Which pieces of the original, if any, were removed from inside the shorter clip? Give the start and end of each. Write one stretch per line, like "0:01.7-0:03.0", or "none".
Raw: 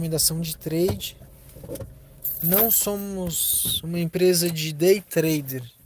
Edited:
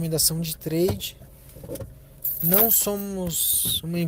none